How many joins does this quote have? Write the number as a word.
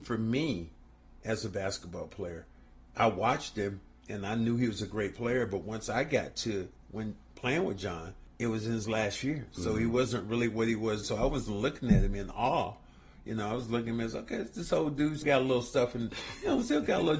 two